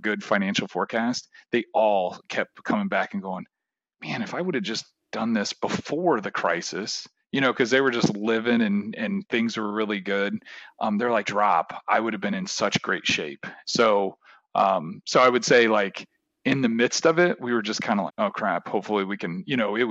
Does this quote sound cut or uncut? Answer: cut